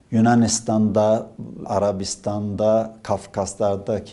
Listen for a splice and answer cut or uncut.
cut